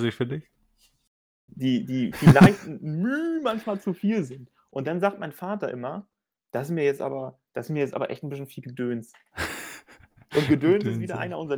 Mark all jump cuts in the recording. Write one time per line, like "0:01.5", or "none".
0:01.5